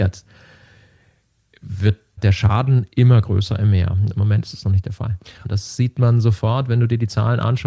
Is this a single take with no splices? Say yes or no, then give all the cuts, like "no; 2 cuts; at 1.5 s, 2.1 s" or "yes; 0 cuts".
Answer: no; 3 cuts; at 2.2 s, 4.1 s, 5.4 s